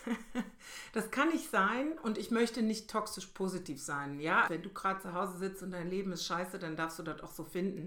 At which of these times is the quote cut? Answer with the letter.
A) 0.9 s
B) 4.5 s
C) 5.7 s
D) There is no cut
B